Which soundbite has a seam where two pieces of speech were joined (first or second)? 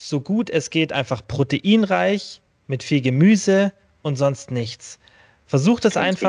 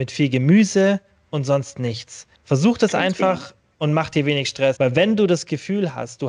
second